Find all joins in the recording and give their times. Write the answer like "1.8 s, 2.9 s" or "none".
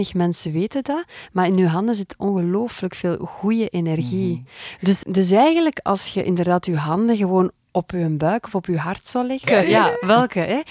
5.0 s, 9.4 s